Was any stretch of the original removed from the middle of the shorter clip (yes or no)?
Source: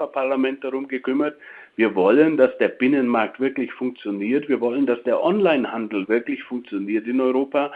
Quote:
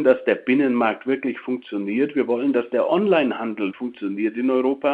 yes